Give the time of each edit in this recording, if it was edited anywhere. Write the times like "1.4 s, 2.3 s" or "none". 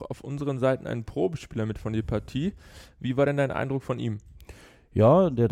none